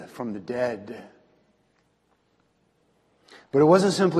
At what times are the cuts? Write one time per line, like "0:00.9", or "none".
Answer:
none